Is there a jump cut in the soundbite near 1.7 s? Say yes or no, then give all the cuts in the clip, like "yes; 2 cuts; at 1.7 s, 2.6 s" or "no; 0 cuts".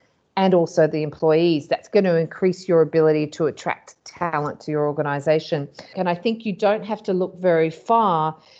no; 1 cut; at 5.9 s